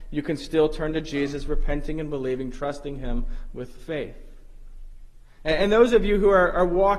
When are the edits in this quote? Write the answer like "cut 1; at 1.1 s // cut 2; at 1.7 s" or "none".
none